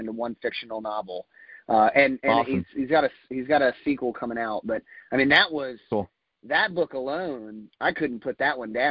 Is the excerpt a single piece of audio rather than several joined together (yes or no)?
yes